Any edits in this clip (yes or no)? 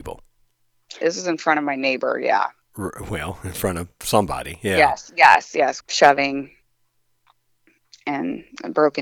yes